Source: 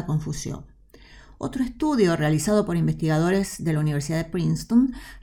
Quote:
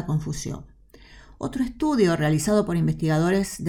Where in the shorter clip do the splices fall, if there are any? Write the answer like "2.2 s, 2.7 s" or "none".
none